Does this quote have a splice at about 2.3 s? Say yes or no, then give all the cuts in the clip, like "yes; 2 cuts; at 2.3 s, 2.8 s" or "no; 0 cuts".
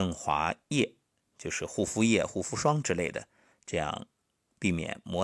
no; 0 cuts